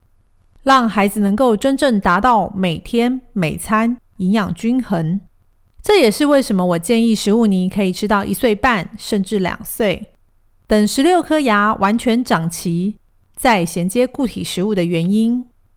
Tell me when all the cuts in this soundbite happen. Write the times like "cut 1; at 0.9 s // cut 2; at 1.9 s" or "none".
none